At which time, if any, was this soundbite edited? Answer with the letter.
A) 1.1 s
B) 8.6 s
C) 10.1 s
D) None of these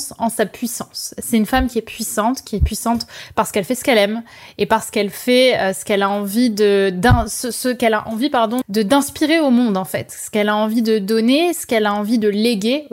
B